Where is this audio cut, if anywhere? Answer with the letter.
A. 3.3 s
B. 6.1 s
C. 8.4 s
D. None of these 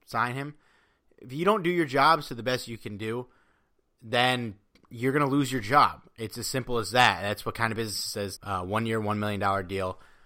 C